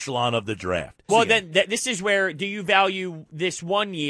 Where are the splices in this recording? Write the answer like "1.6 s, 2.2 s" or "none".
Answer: 1.1 s